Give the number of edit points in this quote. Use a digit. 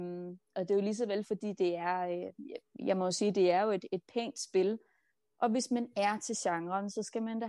0